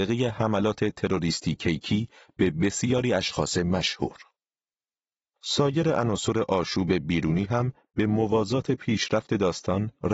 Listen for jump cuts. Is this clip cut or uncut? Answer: uncut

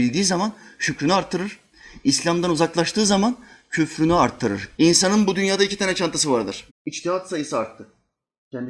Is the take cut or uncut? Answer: cut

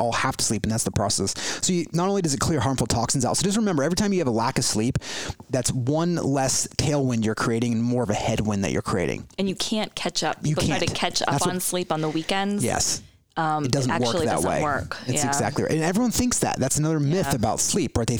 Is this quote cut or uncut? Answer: uncut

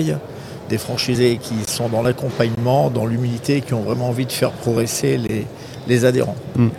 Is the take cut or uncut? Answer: uncut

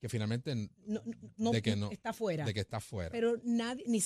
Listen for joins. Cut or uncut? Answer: cut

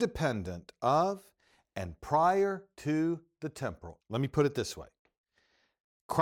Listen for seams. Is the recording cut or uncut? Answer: cut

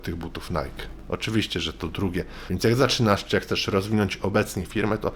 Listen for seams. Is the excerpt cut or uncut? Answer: uncut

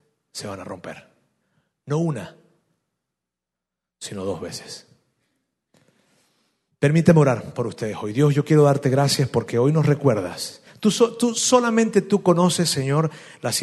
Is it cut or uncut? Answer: uncut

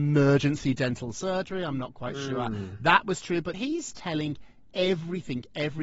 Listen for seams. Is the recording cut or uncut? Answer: cut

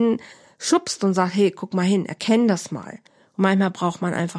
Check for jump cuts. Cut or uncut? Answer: uncut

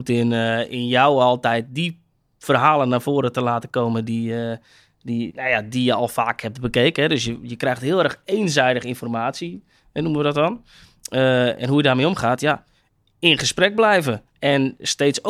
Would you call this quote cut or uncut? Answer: cut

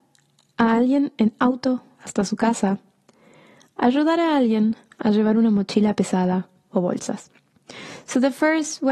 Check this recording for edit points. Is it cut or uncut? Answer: cut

